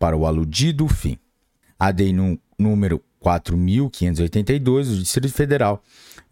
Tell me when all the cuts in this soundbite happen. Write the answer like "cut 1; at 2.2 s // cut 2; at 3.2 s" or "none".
cut 1; at 1.6 s